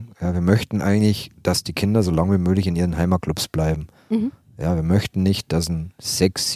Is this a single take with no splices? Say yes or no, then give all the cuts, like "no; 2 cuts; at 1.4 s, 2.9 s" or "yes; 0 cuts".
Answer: yes; 0 cuts